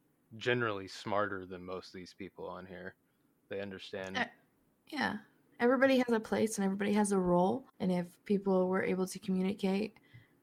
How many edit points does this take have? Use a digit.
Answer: 0